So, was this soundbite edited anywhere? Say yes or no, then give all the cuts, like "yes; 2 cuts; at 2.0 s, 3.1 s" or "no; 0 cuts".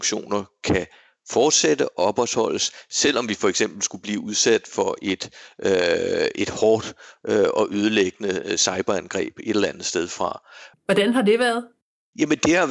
yes; 1 cut; at 10.7 s